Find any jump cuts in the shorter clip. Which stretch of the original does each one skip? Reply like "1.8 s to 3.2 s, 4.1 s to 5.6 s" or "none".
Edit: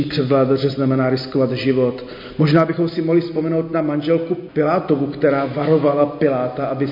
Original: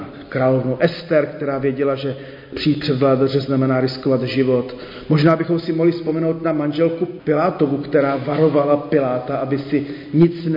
none